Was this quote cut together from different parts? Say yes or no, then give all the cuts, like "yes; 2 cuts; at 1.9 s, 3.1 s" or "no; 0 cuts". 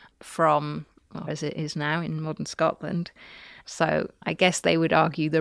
yes; 2 cuts; at 1.3 s, 3.6 s